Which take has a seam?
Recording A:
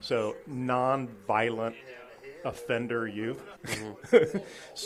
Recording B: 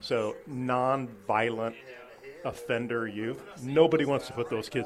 A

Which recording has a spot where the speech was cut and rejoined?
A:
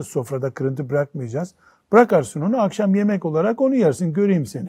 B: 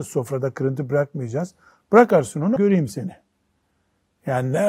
B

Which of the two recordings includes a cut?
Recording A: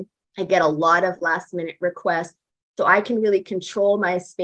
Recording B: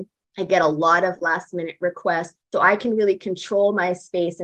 B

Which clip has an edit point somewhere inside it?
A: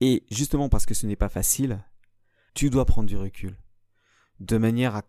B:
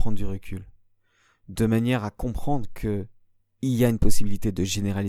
A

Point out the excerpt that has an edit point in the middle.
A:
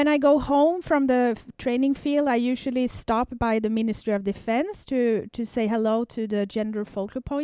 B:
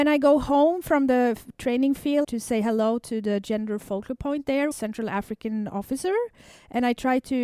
B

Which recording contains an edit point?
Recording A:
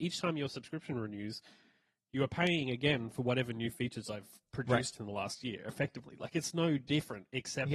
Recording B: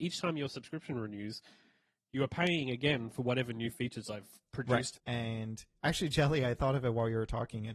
B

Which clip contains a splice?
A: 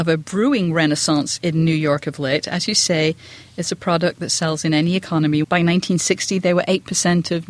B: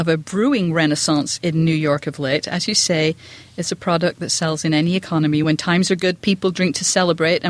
A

